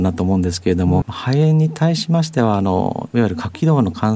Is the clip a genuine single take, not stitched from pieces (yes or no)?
no